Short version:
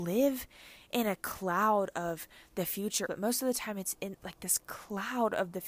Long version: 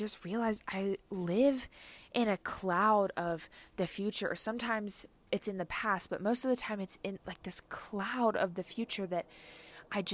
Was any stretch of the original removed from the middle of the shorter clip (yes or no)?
yes